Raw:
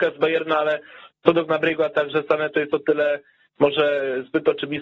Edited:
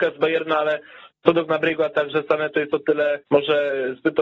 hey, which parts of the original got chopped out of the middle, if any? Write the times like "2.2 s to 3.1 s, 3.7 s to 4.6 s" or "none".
3.2 s to 3.5 s